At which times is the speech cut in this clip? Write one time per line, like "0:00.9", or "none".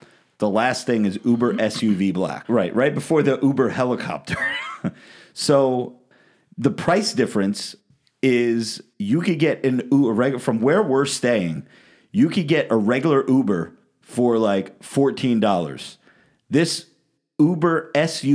0:02.4